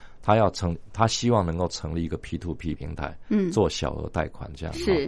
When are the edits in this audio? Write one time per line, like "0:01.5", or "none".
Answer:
0:02.7

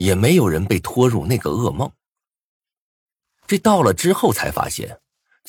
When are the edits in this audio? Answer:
0:03.2

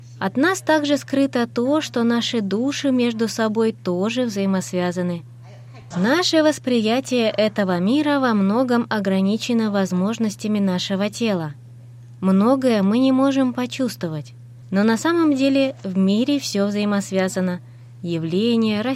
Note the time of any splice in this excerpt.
0:05.9

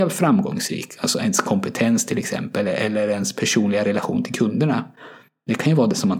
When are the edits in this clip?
none

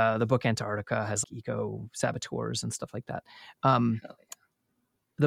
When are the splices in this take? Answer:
0:01.2

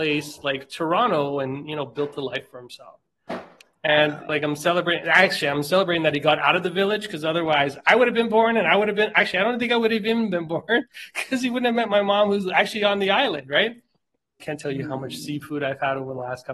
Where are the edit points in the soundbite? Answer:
0:04.3
0:14.4

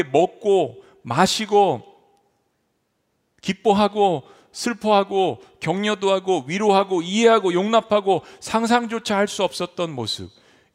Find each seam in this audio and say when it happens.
none

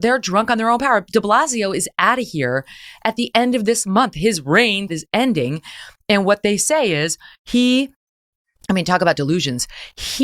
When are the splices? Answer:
0:04.9

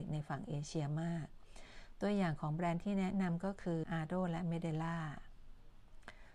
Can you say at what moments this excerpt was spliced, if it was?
0:03.8

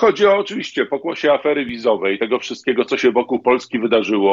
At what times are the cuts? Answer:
none

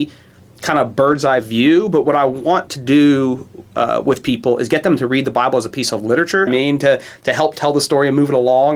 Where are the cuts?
0:06.5

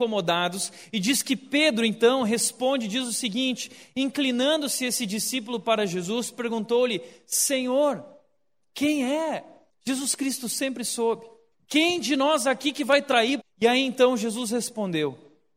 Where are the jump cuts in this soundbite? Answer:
0:09.7
0:11.5
0:13.4

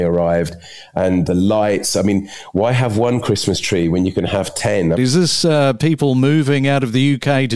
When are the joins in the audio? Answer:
0:01.3
0:04.9

